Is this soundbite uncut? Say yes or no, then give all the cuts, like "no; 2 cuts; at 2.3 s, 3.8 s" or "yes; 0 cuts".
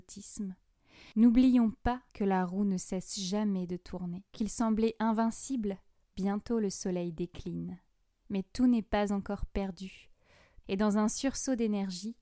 no; 3 cuts; at 4.3 s, 6.0 s, 10.6 s